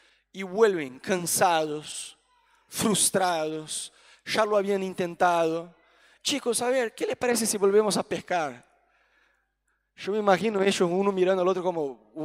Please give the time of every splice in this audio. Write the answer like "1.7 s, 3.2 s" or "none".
6.2 s